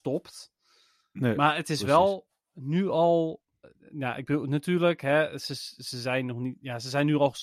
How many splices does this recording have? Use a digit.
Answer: 0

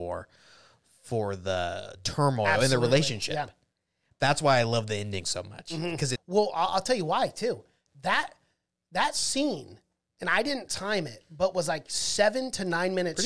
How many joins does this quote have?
1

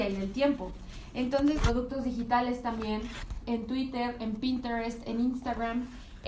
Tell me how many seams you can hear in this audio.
2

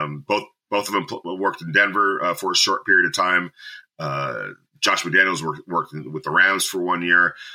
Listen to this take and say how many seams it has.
0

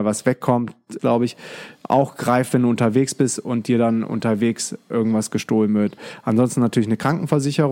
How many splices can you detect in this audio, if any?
1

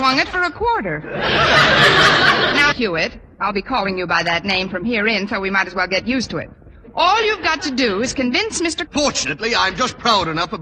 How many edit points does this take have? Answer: 2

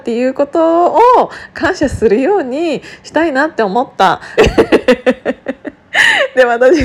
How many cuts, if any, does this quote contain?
1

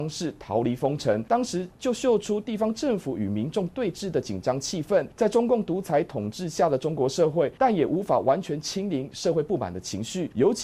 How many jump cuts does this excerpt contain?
2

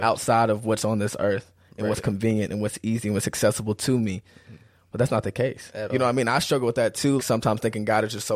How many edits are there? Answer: 1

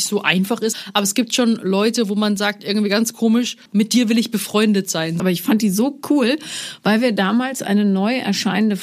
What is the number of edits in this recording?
2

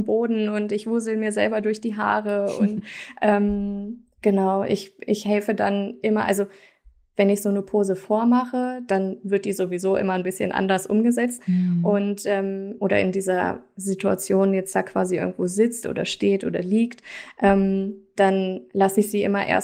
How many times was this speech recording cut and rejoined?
2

